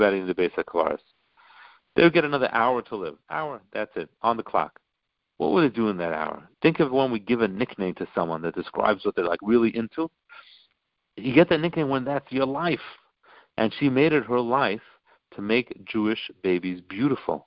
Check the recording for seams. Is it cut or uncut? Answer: cut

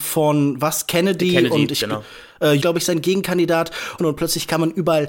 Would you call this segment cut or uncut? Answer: cut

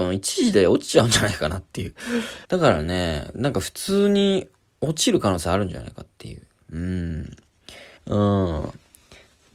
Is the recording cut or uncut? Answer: cut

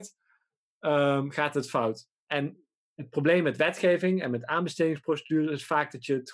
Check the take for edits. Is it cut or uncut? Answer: uncut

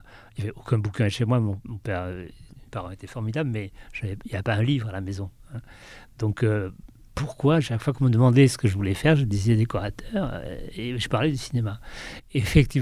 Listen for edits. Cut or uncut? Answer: uncut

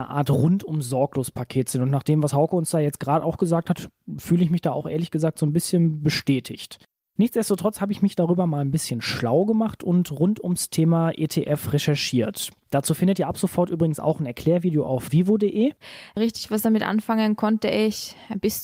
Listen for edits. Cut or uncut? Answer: uncut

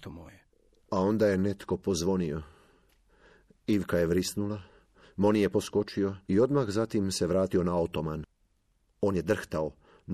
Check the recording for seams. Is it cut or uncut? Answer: cut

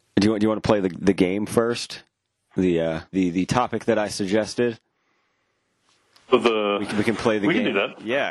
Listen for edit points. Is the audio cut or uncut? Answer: cut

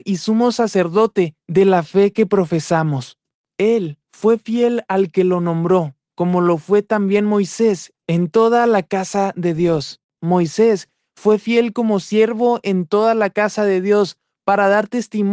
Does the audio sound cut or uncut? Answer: cut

